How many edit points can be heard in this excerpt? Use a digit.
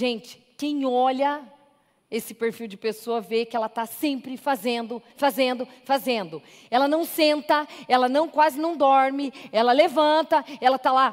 1